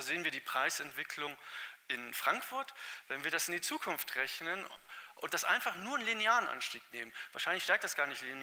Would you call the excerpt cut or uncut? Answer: cut